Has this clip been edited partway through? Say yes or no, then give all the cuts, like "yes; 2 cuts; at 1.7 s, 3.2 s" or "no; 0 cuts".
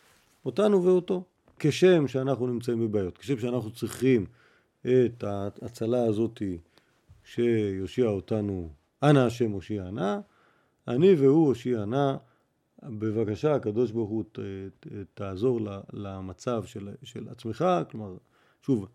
no; 0 cuts